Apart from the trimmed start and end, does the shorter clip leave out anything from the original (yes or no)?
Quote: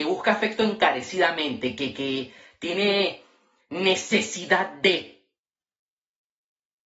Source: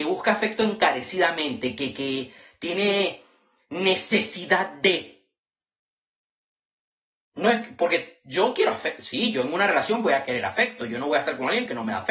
no